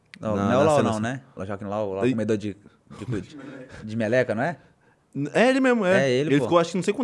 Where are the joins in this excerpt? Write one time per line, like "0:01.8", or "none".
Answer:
0:01.4